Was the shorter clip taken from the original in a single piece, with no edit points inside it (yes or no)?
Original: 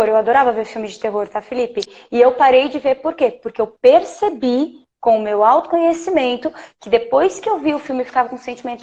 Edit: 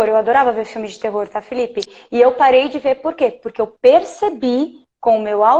yes